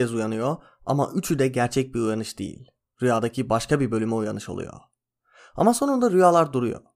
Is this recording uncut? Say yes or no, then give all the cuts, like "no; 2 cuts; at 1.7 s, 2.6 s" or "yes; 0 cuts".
yes; 0 cuts